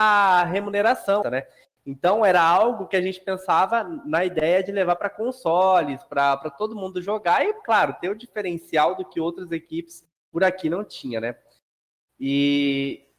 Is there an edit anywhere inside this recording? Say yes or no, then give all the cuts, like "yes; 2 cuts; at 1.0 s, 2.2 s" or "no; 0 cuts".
yes; 1 cut; at 1.2 s